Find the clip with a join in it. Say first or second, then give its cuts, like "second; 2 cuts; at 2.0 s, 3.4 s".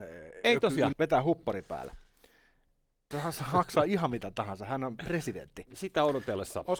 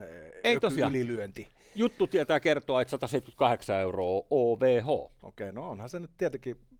first; 3 cuts; at 0.9 s, 3.1 s, 5.7 s